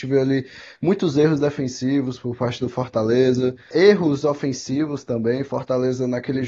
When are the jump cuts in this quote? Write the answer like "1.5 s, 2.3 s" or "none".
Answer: 3.7 s